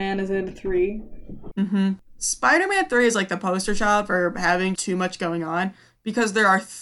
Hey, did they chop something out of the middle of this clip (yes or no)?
yes